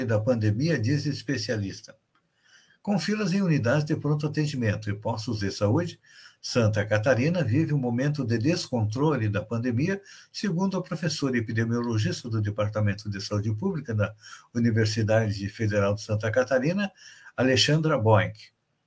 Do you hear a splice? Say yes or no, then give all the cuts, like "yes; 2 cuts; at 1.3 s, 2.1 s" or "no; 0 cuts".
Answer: no; 0 cuts